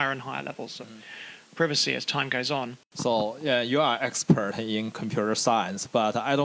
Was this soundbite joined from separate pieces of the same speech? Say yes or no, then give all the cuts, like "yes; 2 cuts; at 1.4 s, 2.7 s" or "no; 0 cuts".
no; 0 cuts